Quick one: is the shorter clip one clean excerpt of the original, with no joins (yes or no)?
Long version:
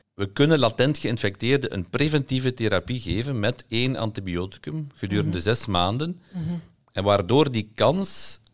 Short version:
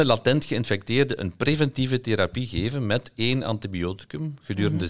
yes